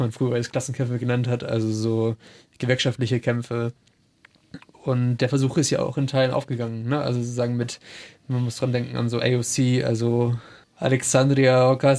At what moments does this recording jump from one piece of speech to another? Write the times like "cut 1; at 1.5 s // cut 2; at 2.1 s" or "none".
none